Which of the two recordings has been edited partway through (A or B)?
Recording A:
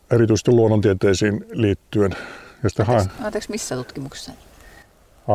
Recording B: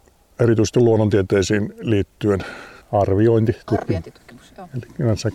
B